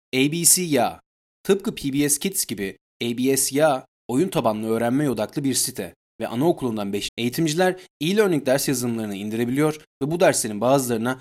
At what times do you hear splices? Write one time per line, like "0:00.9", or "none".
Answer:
0:07.1